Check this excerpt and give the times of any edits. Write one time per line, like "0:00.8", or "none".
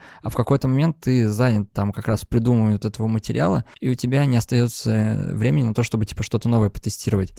0:03.7